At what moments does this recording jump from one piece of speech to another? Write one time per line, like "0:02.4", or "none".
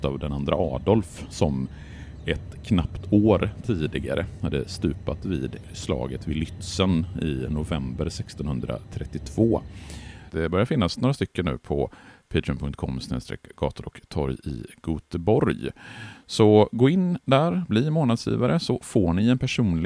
0:10.3